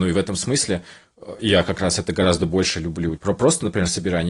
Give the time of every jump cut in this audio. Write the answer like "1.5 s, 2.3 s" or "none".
1.4 s, 3.2 s